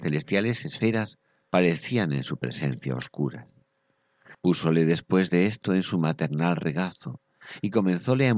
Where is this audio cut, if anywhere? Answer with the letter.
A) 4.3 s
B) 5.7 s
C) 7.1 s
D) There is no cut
A